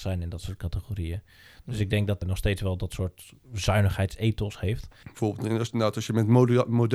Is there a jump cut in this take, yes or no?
yes